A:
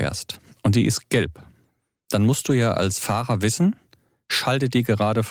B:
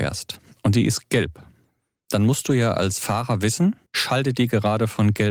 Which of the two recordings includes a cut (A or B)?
B